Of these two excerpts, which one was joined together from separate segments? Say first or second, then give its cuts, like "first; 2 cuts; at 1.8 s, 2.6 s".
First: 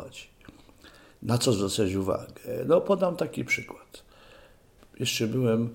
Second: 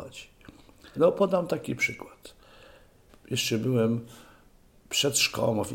second; 1 cut; at 1.0 s